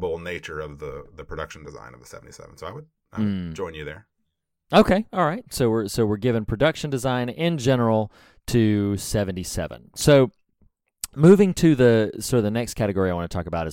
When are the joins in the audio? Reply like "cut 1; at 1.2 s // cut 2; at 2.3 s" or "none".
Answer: none